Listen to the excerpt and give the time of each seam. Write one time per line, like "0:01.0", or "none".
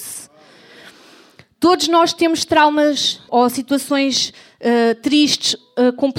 0:03.3